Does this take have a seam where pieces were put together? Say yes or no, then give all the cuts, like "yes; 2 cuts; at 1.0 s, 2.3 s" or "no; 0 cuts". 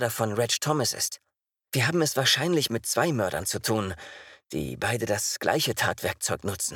no; 0 cuts